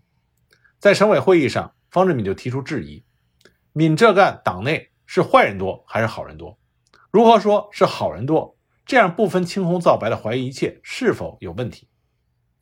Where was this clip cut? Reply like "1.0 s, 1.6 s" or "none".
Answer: 7.0 s